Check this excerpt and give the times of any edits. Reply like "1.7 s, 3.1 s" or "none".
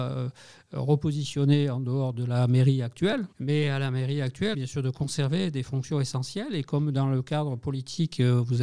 3.3 s, 4.5 s